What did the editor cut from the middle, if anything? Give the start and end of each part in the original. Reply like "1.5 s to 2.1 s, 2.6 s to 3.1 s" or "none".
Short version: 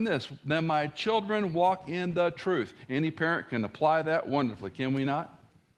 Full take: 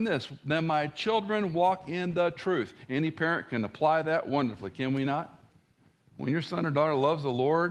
none